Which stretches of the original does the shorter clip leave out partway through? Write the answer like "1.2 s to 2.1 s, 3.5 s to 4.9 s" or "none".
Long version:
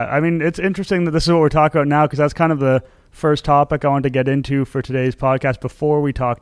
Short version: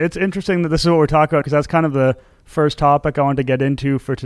1.8 s to 2.1 s